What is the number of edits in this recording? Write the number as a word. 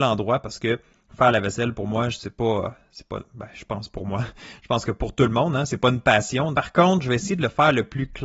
one